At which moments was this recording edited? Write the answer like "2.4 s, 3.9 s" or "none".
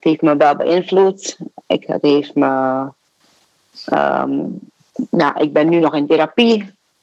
none